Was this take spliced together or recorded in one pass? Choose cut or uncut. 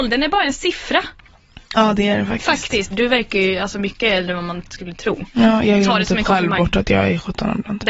cut